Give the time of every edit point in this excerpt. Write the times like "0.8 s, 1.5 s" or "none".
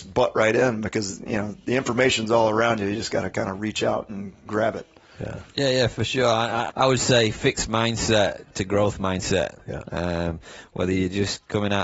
6.7 s, 9.6 s